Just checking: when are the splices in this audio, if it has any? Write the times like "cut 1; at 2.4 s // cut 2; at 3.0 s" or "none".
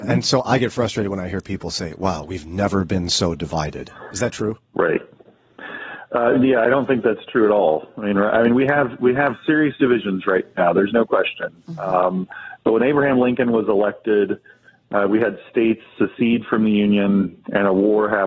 none

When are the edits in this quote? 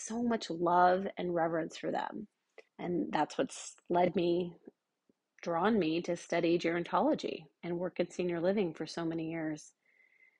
cut 1; at 2.7 s

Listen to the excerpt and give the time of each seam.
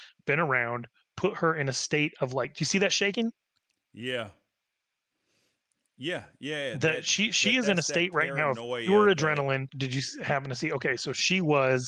cut 1; at 9.7 s

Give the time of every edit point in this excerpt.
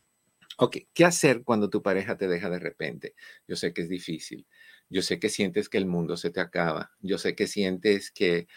none

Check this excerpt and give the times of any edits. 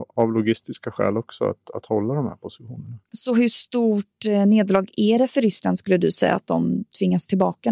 cut 1; at 3.0 s

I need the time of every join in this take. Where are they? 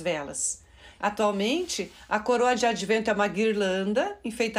cut 1; at 1.0 s

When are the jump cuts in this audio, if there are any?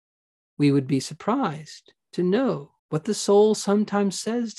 cut 1; at 2.8 s

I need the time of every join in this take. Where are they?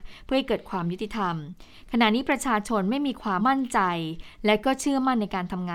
cut 1; at 3.4 s

